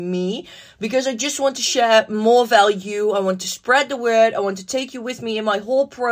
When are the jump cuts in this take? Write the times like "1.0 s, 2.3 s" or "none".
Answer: none

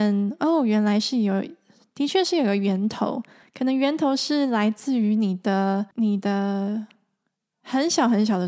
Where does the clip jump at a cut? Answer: 3.4 s, 5.9 s

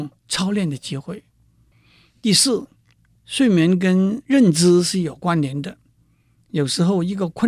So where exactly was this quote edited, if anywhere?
none

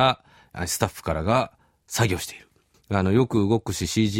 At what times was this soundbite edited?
2.7 s

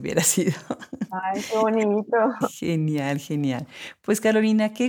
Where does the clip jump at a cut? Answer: none

